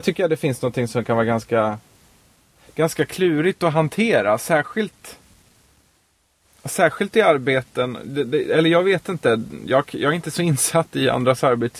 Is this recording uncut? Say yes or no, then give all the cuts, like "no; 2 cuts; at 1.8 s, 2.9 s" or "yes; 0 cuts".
yes; 0 cuts